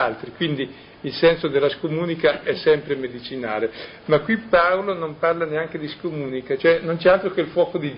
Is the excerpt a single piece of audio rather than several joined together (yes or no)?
no